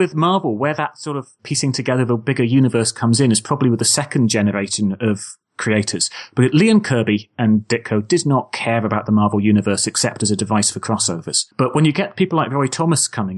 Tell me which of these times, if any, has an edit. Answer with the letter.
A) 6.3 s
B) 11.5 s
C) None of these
C